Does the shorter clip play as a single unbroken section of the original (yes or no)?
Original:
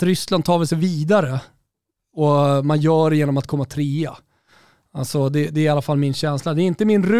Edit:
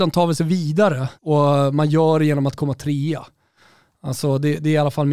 no